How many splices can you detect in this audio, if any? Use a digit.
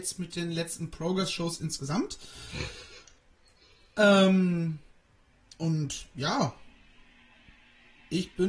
0